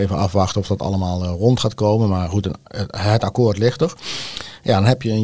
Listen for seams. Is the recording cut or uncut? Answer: uncut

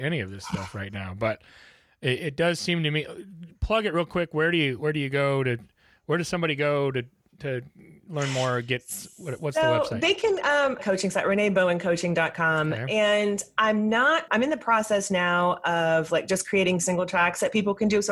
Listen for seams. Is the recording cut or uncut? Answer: cut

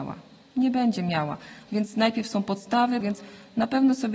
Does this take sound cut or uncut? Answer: cut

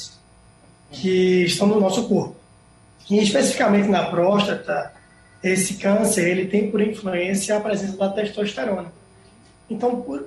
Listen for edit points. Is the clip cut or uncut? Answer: uncut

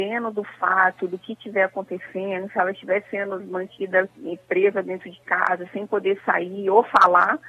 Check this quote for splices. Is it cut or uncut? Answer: cut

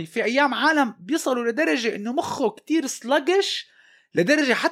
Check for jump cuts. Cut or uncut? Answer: uncut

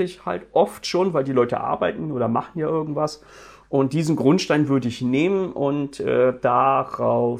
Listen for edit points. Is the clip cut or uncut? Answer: uncut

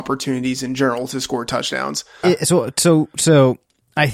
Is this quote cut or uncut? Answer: cut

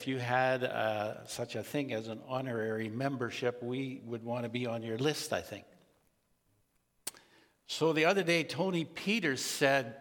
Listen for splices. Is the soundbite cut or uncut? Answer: uncut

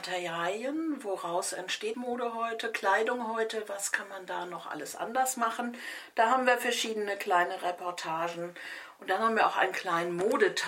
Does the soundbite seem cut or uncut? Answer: cut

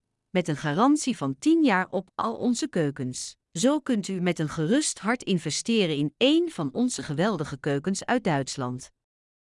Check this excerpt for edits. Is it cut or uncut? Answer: cut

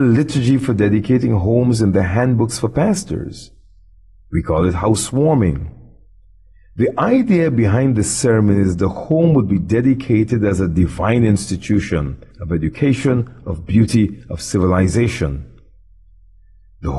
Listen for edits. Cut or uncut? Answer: cut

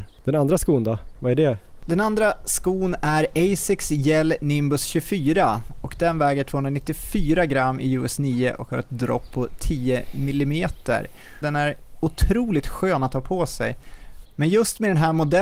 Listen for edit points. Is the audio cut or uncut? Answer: cut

